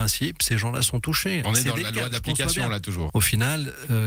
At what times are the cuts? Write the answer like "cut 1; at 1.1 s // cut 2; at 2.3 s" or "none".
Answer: cut 1; at 1.4 s // cut 2; at 3.1 s